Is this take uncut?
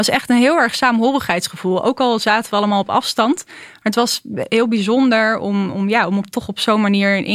yes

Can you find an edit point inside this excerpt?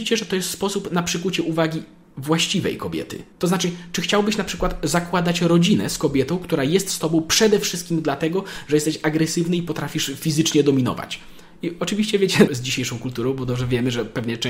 yes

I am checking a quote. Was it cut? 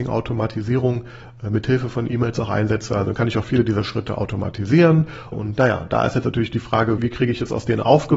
yes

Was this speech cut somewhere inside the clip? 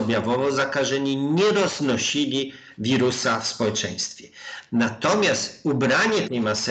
no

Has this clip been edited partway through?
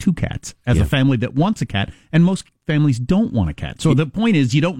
no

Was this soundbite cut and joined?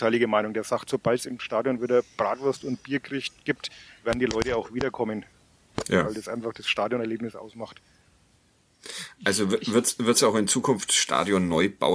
no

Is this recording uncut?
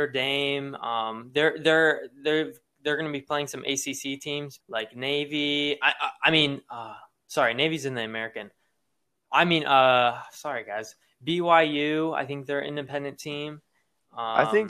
no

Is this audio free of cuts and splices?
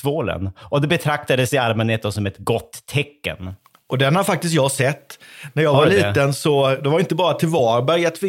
yes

